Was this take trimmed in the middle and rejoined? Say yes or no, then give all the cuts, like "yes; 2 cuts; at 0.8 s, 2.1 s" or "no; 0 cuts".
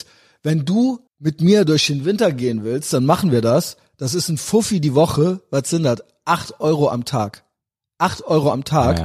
yes; 1 cut; at 1.1 s